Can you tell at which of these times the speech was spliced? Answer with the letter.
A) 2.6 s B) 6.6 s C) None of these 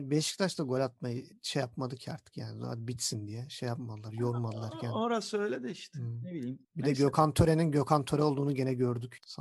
C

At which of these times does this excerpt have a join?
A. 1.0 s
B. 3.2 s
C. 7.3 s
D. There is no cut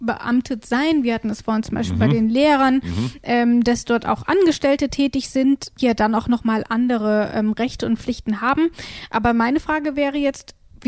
D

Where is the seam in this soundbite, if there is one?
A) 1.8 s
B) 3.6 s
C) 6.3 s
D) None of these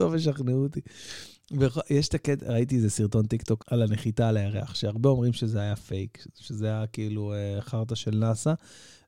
B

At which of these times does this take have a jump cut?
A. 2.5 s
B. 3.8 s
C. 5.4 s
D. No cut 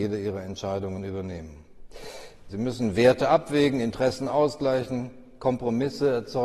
A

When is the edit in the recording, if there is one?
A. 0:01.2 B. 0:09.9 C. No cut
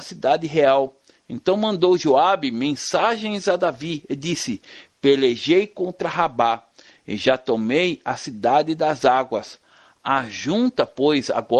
C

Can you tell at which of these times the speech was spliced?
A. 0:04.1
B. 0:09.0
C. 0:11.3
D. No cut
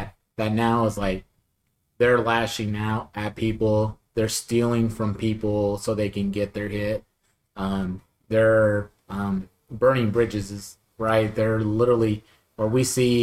B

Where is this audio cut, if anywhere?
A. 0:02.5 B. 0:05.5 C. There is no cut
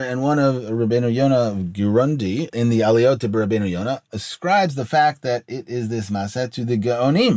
A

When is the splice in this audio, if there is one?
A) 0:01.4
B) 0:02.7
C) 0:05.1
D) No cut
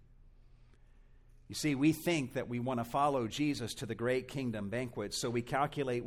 D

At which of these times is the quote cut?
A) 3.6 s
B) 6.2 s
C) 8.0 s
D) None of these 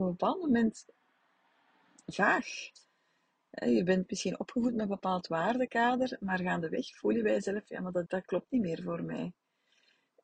C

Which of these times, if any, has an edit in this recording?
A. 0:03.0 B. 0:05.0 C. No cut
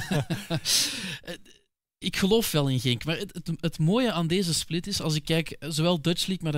C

